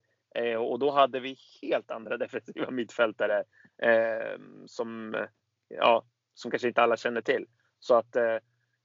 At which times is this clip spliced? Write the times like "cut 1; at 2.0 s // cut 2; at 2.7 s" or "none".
none